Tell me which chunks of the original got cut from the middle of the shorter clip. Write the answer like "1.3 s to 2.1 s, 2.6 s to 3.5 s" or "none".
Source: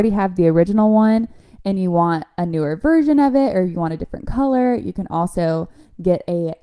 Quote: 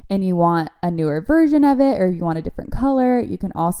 none